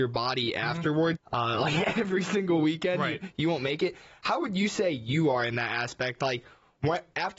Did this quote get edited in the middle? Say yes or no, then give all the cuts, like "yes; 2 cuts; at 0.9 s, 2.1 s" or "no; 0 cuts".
yes; 1 cut; at 1.2 s